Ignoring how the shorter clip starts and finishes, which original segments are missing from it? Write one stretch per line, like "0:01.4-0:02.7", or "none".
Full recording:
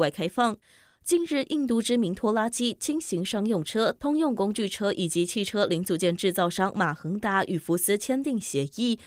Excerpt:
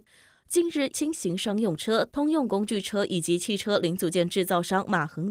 0:01.5-0:02.8